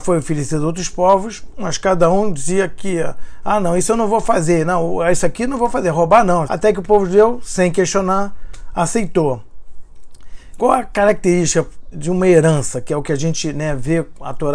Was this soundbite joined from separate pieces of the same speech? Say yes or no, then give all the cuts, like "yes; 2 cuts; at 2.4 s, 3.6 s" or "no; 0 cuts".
yes; 2 cuts; at 6.5 s, 11.9 s